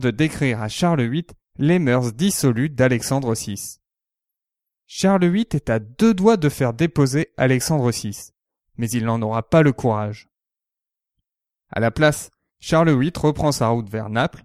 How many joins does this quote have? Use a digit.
0